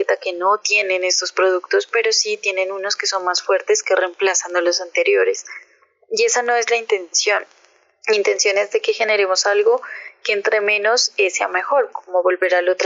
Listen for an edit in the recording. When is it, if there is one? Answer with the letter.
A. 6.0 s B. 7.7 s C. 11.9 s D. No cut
C